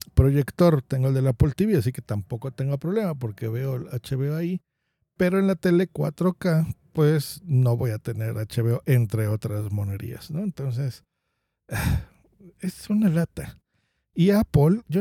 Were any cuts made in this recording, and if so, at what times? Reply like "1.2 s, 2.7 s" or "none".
none